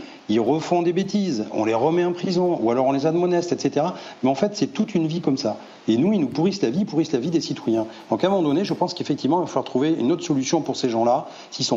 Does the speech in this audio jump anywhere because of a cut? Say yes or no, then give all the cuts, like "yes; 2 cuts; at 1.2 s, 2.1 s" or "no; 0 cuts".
no; 0 cuts